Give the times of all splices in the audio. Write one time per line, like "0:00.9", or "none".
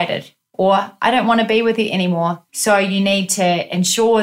0:02.5

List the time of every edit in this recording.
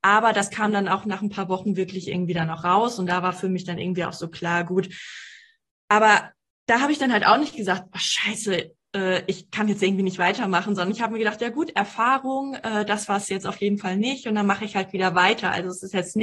none

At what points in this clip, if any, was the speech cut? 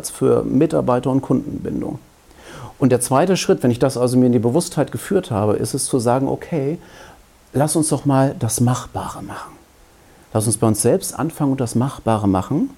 none

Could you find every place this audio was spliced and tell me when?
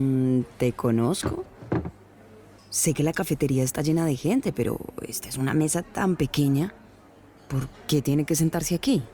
0:02.6

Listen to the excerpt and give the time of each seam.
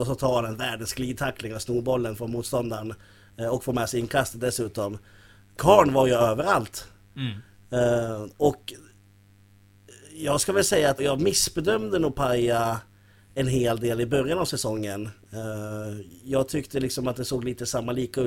0:05.6
0:11.0

